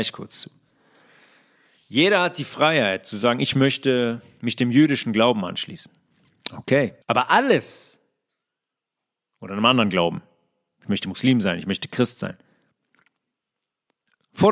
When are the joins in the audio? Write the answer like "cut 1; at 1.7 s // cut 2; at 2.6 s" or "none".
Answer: cut 1; at 7.0 s